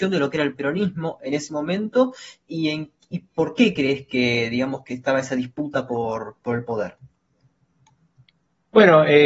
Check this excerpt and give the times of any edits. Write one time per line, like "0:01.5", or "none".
0:06.4